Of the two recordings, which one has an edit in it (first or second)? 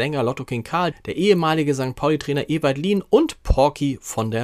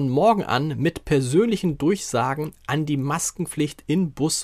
first